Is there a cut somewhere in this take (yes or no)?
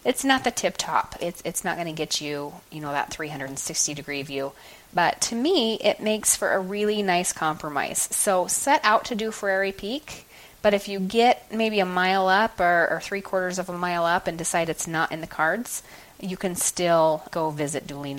yes